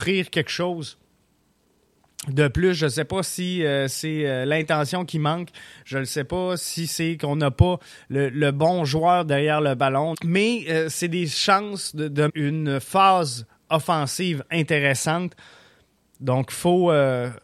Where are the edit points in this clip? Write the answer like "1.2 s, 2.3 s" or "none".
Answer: 10.1 s, 12.3 s